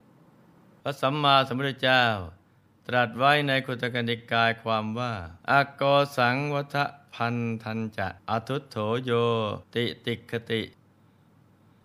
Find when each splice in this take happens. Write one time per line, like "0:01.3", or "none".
0:05.4
0:08.2
0:09.7